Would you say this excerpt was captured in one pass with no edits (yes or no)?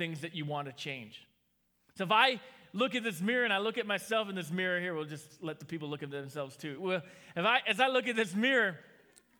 yes